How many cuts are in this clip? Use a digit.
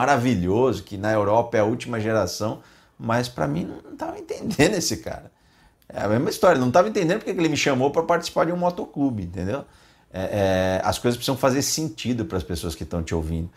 0